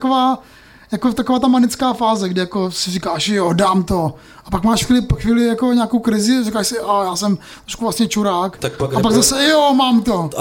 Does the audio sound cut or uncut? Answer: uncut